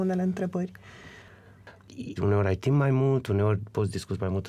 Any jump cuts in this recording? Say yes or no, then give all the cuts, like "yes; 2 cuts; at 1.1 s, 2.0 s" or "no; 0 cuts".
yes; 1 cut; at 2.2 s